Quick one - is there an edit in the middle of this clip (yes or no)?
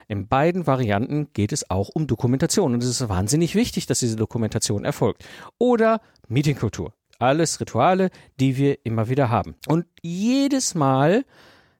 yes